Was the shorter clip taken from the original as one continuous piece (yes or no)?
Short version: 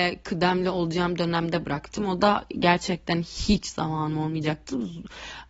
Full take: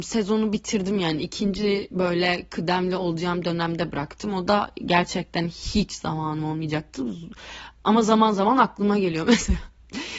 yes